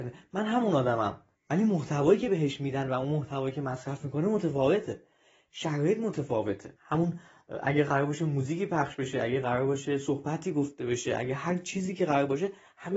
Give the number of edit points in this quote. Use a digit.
2